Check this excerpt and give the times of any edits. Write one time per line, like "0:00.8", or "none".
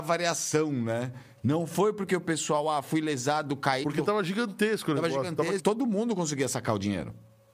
0:01.4
0:03.8
0:05.6